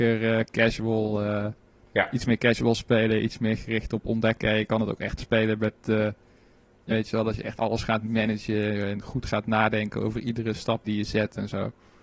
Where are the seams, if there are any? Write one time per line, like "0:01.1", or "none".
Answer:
0:06.9
0:10.8